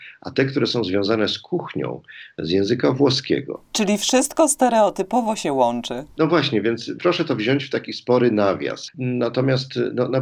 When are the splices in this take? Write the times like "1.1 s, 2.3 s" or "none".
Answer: 8.9 s